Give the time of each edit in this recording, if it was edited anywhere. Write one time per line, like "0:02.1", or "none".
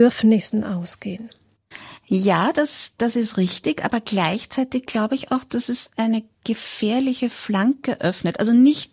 none